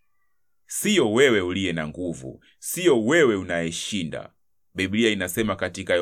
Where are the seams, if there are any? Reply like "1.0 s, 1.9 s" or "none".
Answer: none